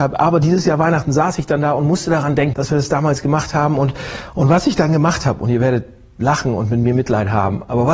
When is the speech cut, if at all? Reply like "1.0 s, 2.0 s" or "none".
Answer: 2.5 s